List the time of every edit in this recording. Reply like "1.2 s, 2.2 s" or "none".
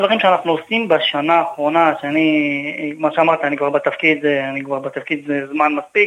none

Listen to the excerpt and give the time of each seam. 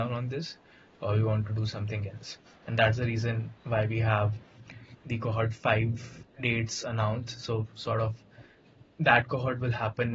2.4 s

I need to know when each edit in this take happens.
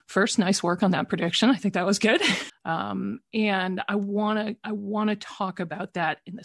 2.5 s

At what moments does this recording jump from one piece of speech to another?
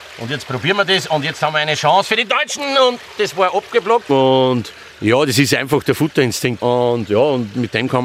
4.1 s, 6.6 s

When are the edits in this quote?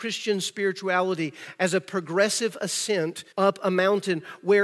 3.3 s

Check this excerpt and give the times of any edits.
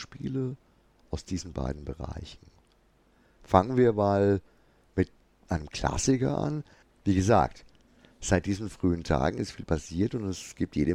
6.8 s

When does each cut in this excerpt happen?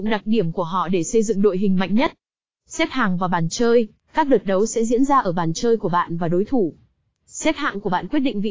none

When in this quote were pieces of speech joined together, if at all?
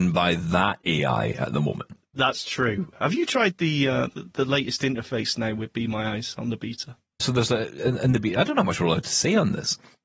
7.2 s

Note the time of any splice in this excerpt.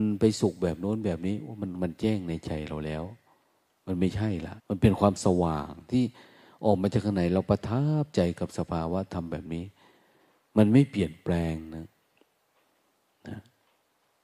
4.6 s

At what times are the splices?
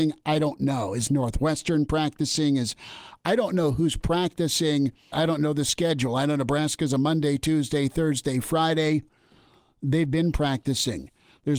5.1 s

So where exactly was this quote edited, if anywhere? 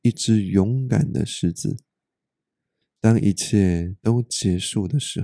2.8 s

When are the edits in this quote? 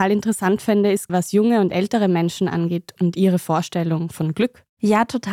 1.1 s

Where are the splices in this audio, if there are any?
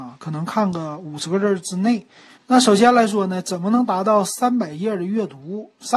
2.3 s

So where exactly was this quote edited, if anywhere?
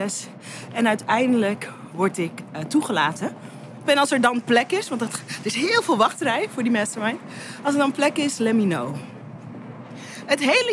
3.8 s

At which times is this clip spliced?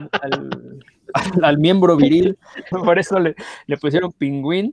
2.7 s

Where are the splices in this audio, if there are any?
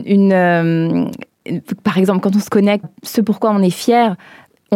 2.8 s

